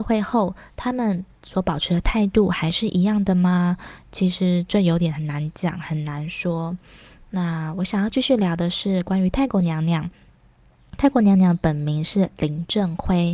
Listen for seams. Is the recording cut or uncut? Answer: uncut